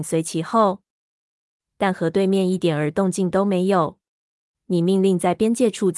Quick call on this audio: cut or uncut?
cut